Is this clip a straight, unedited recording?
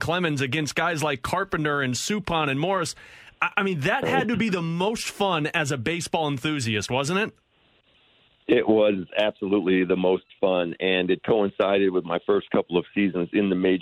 yes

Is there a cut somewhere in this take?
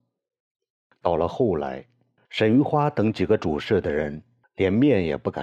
yes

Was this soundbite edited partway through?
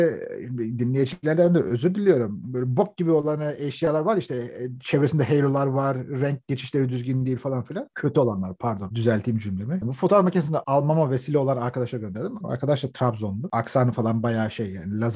yes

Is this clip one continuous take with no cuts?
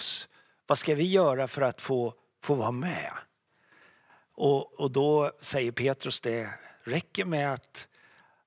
no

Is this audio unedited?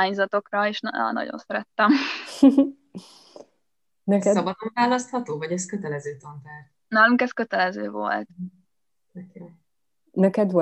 yes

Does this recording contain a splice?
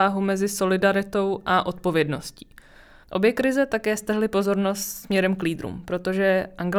yes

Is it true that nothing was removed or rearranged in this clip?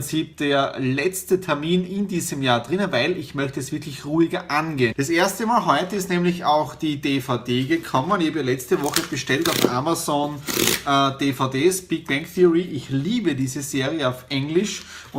no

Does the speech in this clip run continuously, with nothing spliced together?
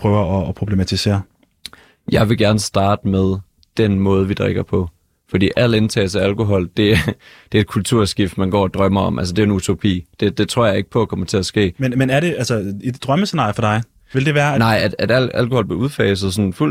yes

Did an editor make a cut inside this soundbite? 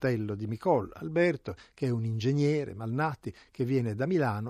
no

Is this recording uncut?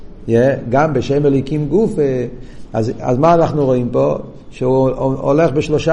yes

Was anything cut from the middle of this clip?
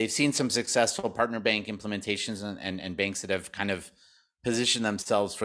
no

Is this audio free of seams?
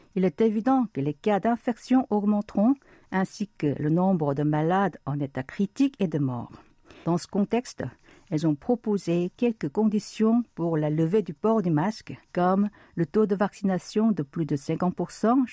no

